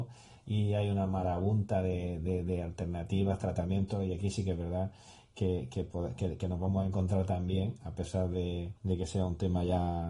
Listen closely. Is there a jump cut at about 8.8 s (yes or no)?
yes